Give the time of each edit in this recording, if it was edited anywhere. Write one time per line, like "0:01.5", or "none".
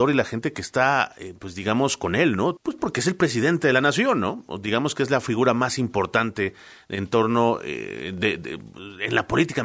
0:02.6